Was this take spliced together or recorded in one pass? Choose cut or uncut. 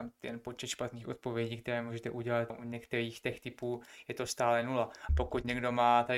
cut